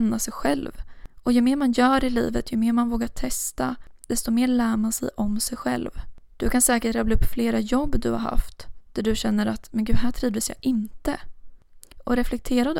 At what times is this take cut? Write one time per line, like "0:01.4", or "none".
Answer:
none